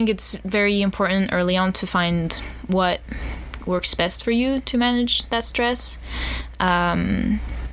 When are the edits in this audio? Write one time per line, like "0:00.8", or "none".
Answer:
none